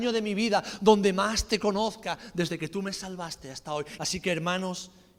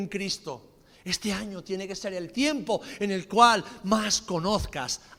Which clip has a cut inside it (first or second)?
first